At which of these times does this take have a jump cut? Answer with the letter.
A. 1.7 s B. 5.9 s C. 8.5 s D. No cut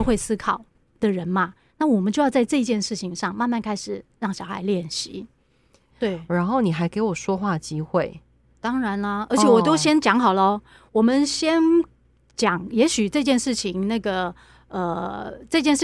B